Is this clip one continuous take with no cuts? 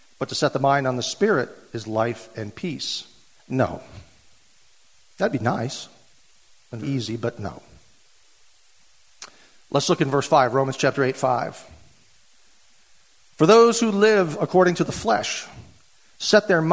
no; 2 cuts; at 3.4 s, 6.8 s

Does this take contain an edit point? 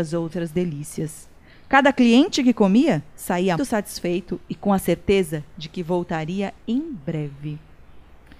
yes; 1 cut; at 3.6 s

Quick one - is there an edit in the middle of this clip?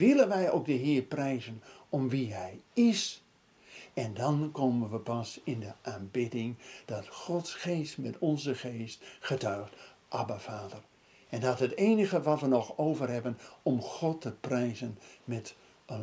no; 0 cuts

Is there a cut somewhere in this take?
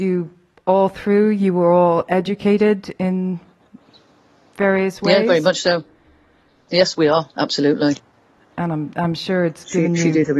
no; 0 cuts

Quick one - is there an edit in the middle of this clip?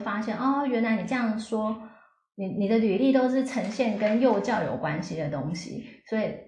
no; 0 cuts

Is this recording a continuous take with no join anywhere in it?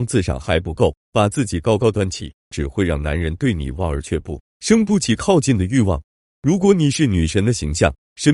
no; 1 cut; at 2.5 s

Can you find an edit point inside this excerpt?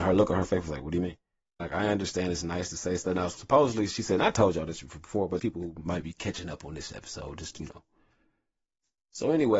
yes; 2 cuts; at 1.6 s, 5.4 s

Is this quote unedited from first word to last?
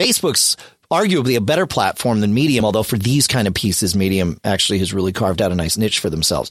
yes; 0 cuts

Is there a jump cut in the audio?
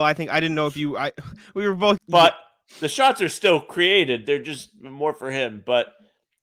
yes; 1 cut; at 2.0 s

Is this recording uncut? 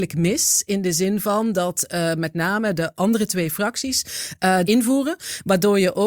no; 1 cut; at 4.6 s

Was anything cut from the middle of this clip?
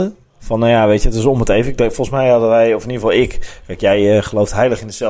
no; 0 cuts

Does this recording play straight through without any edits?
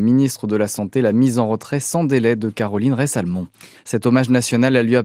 no; 1 cut; at 3.7 s

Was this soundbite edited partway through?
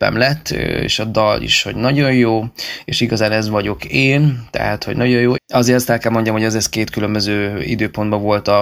yes; 1 cut; at 5.3 s

